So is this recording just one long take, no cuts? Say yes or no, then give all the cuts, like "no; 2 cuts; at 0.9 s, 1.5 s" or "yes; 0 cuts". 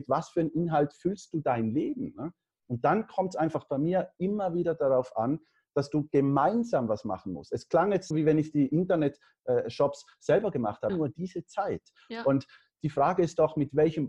no; 2 cuts; at 8.1 s, 10.9 s